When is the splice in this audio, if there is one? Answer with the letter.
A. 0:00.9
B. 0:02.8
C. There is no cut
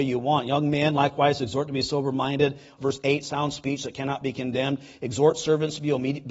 B